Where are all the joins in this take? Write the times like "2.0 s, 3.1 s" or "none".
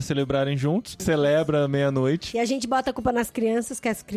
1.0 s